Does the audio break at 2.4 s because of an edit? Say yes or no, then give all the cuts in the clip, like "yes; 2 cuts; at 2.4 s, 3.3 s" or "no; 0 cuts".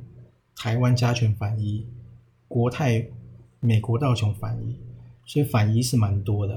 no; 0 cuts